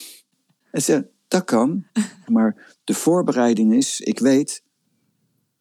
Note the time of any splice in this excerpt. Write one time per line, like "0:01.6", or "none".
0:02.3